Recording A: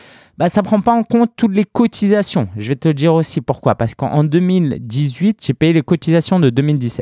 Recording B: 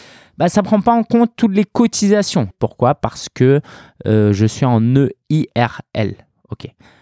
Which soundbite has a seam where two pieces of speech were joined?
B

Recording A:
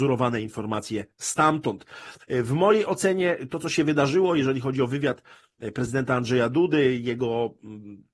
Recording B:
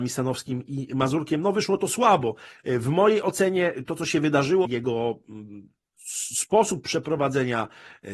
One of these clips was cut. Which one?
B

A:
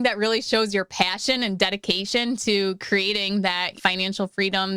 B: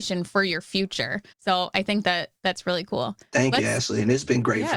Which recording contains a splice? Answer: B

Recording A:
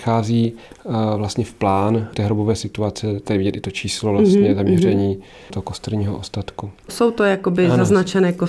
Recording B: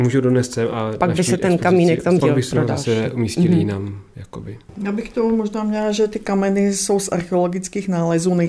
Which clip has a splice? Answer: B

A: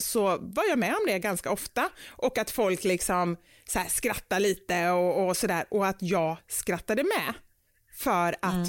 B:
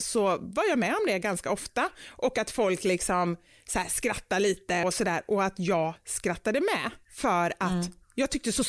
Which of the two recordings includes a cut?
B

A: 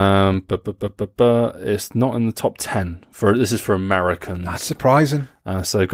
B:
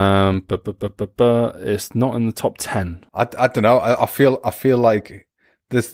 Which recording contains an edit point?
B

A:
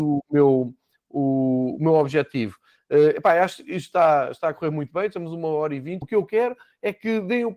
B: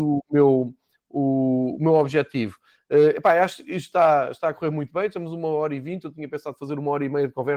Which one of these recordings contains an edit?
A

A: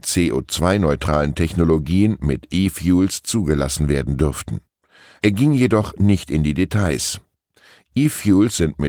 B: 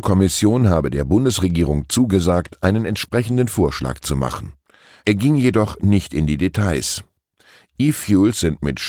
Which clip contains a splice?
B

